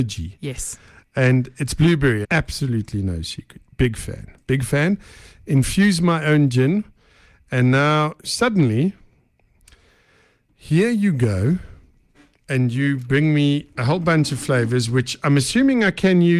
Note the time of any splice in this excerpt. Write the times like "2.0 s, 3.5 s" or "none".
2.2 s

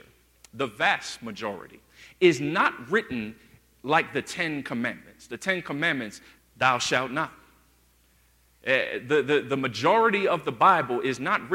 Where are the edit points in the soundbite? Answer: 6.4 s

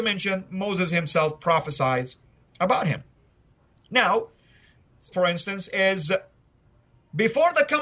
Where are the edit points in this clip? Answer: 5.1 s

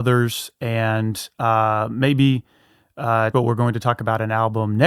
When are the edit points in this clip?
3.3 s

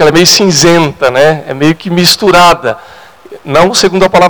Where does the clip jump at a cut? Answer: none

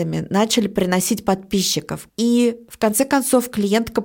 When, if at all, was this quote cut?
2.1 s

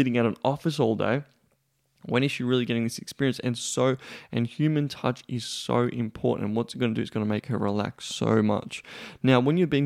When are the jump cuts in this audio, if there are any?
none

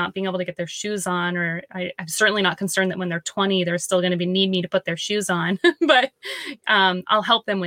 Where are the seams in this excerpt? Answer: none

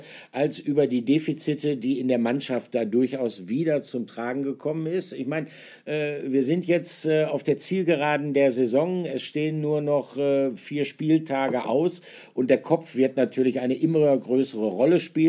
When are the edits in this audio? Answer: none

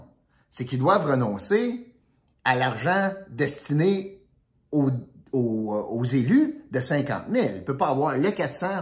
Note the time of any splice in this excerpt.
none

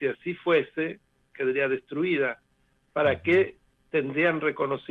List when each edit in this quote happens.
1.3 s

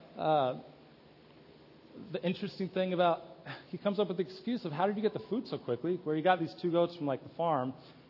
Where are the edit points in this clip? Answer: none

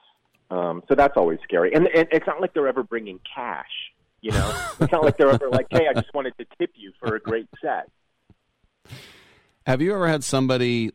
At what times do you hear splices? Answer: 1.9 s

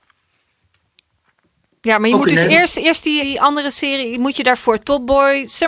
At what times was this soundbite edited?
3.2 s

